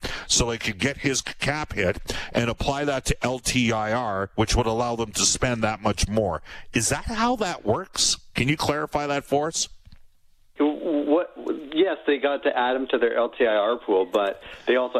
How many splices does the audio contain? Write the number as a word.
one